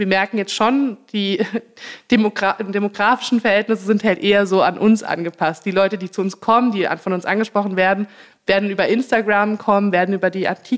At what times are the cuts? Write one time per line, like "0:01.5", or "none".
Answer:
none